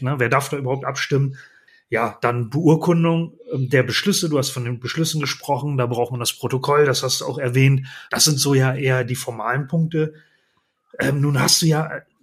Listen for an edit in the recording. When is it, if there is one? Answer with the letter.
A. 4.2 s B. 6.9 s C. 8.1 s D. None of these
C